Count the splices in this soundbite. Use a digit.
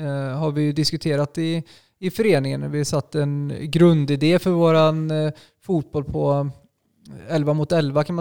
0